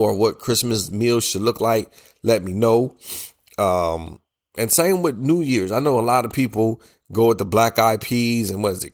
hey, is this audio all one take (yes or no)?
yes